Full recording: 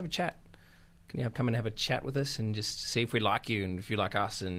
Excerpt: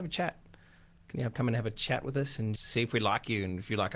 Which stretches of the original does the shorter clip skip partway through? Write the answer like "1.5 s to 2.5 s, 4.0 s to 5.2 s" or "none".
2.6 s to 2.8 s